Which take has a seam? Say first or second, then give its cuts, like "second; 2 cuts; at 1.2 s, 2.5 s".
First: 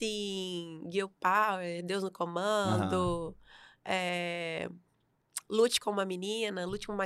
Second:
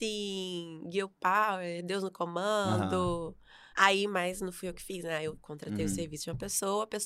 second; 1 cut; at 3.7 s